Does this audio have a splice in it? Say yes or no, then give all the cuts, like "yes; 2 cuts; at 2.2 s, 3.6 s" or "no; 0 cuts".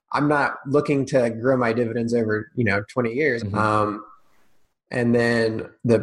yes; 1 cut; at 3.4 s